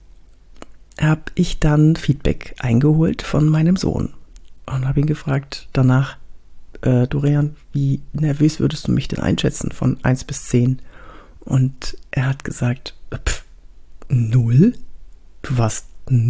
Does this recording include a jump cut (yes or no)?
no